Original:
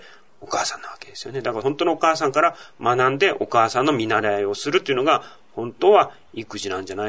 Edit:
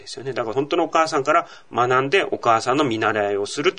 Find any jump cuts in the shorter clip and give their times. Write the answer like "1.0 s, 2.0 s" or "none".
none